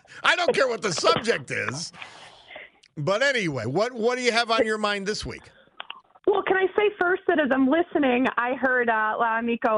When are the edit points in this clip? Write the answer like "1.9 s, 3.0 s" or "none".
none